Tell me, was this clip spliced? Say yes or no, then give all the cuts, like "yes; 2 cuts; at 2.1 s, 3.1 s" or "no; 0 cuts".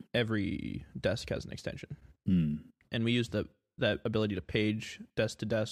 yes; 1 cut; at 2.8 s